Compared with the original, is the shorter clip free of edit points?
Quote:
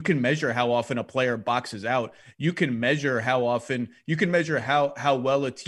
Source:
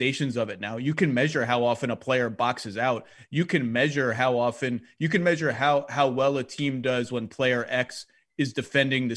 yes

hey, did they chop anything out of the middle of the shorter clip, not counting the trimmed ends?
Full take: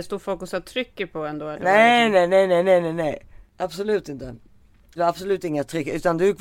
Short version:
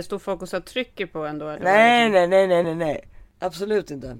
yes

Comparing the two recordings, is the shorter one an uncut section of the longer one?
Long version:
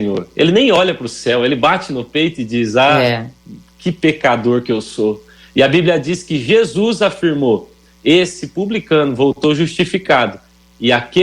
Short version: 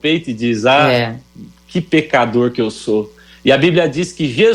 yes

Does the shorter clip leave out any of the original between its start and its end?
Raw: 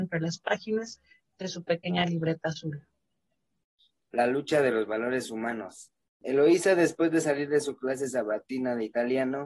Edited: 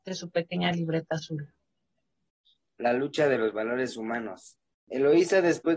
no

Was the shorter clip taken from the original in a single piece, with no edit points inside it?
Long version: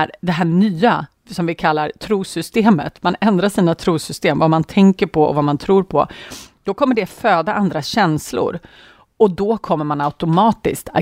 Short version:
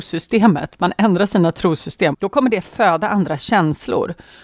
no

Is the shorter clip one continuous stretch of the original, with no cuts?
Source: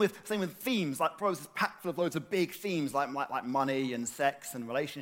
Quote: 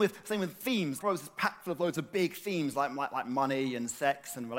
no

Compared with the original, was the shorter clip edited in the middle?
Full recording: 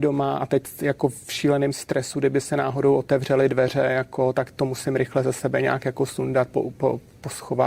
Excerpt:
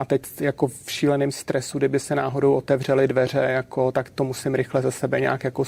no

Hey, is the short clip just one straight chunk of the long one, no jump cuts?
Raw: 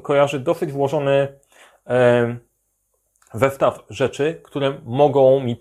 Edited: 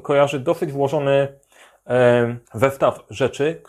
no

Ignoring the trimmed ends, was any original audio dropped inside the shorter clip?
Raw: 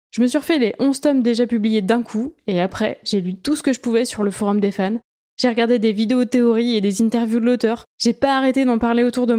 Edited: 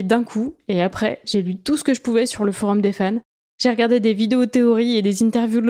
no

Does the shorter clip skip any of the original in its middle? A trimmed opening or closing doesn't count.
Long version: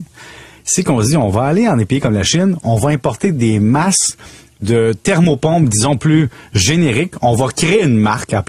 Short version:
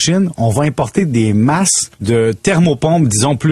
yes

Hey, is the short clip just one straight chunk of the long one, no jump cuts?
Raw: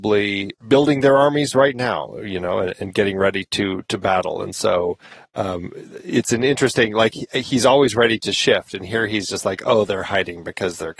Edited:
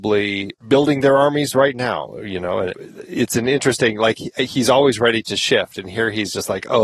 no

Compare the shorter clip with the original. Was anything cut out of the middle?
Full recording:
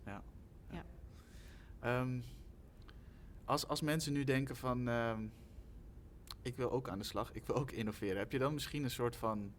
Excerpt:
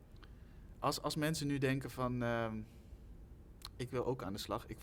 no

